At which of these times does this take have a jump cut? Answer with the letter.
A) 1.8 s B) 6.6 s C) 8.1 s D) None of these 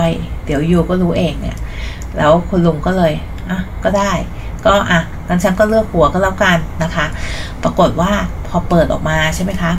D